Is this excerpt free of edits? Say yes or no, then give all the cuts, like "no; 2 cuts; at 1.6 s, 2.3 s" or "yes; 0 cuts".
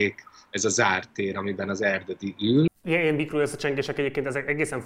no; 1 cut; at 2.7 s